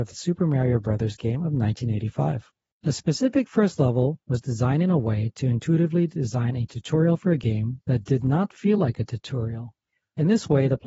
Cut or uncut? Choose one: uncut